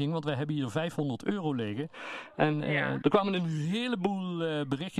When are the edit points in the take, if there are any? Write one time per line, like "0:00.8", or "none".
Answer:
0:03.0

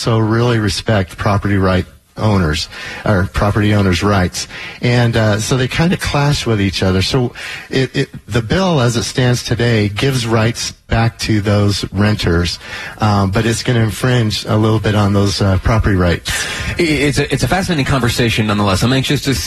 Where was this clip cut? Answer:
none

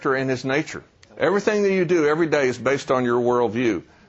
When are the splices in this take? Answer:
0:01.0

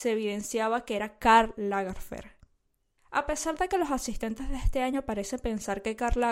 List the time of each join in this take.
none

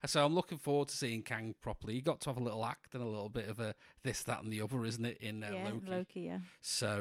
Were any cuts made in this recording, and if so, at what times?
none

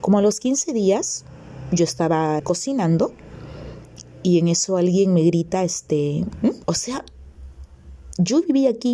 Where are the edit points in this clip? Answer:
0:02.4
0:06.6

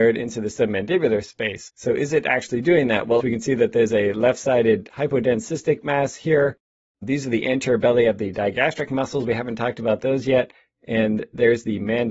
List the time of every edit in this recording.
0:03.2

